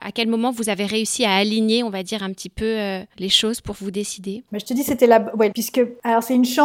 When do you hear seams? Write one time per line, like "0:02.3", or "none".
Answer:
0:05.5

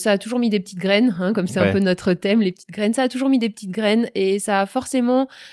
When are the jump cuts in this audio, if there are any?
none

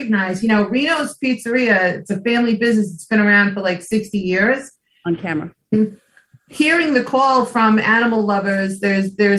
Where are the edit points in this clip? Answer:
none

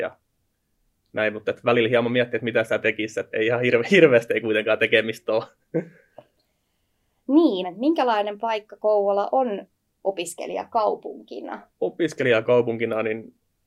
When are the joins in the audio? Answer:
0:03.3
0:07.6
0:11.7

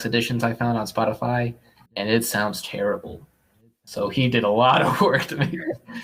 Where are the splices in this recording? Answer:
0:01.9

